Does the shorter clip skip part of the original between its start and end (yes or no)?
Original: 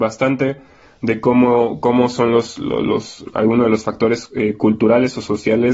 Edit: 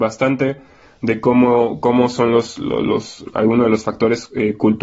no